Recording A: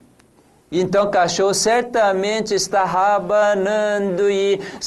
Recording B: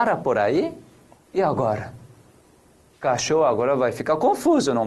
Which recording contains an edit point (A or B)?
B